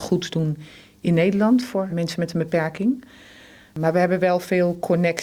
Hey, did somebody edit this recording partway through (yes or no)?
yes